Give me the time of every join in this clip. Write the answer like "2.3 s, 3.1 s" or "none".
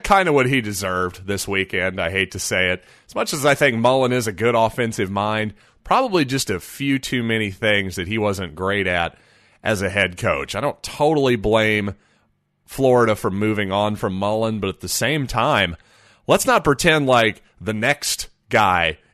none